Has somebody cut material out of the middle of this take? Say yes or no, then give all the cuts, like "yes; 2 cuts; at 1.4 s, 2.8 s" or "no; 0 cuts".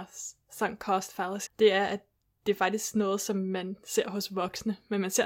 yes; 1 cut; at 1.5 s